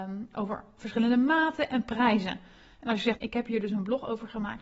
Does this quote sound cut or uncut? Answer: cut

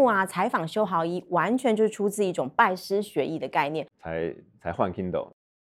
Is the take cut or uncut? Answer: cut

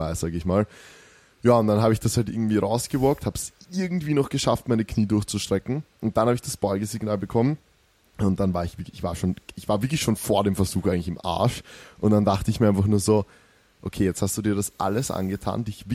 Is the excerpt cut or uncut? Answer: uncut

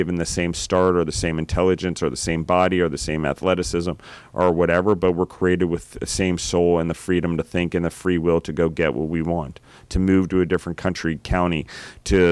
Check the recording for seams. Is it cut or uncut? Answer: uncut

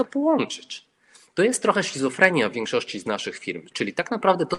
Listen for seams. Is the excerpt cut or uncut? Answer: uncut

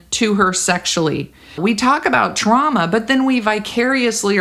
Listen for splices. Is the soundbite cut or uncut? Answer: cut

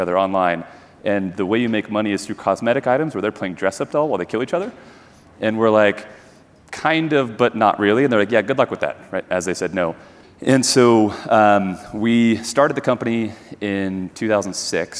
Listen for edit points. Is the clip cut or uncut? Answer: cut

